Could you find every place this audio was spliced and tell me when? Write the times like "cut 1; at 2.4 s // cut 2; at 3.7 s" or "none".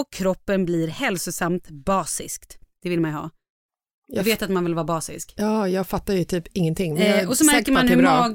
none